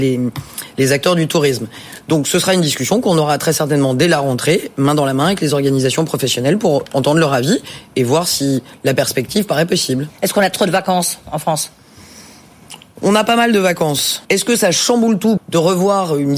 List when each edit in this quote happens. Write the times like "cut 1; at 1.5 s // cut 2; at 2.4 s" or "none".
cut 1; at 14.2 s // cut 2; at 15.4 s